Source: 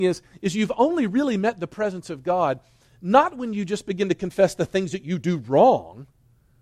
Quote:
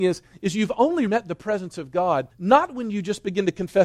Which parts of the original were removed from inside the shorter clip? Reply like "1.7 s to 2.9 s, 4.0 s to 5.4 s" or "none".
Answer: 1.1 s to 1.4 s, 2.6 s to 2.9 s

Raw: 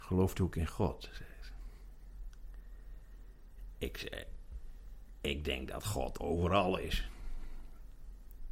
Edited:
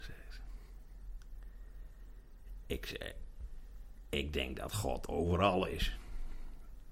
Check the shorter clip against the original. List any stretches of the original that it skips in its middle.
none

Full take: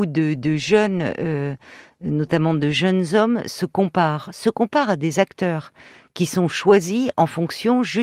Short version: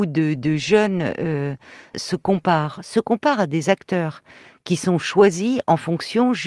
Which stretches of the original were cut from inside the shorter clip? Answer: 1.9 s to 3.4 s

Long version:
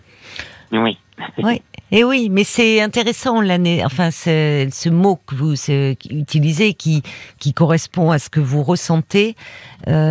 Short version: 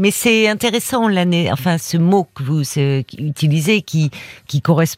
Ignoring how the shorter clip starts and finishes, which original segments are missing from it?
4.1 s to 4.7 s

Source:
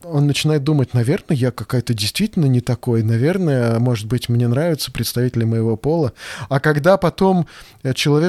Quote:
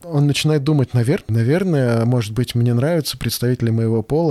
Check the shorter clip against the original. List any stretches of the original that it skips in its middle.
1.3 s to 3.0 s

